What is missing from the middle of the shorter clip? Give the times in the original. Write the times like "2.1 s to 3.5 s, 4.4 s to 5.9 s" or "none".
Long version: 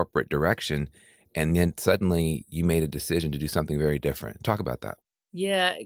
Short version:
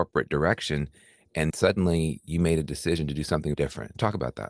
1.5 s to 1.7 s, 3.8 s to 4.0 s